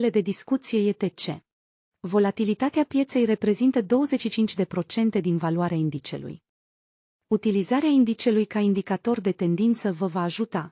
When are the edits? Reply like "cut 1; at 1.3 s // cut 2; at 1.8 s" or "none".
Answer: cut 1; at 1.9 s // cut 2; at 7.1 s